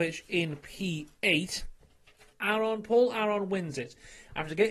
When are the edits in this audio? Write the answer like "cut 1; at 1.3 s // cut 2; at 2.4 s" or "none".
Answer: cut 1; at 2.3 s